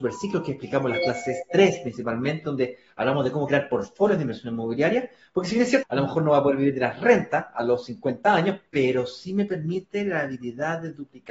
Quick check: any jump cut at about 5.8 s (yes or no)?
yes